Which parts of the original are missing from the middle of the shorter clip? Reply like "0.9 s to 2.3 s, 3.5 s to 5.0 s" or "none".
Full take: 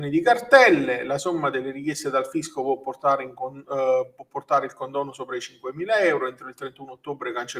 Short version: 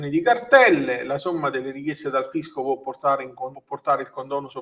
3.5 s to 4.2 s